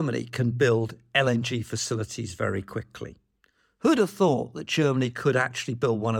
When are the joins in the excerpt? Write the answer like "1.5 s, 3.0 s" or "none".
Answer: none